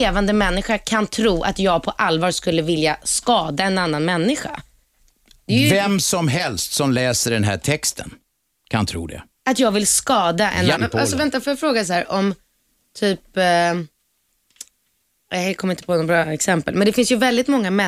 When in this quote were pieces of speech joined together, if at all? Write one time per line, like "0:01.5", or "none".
0:10.8